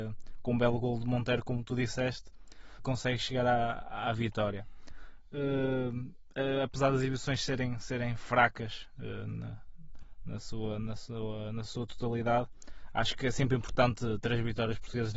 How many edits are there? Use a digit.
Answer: 1